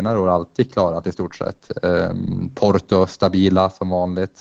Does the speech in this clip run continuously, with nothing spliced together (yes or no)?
yes